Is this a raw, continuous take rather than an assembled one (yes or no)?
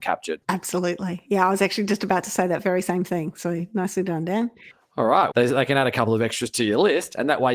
no